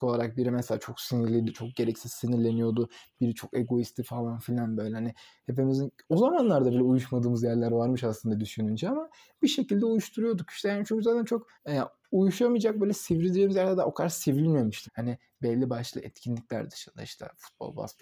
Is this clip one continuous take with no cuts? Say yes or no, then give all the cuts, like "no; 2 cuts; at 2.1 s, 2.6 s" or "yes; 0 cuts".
no; 2 cuts; at 11.5 s, 14.9 s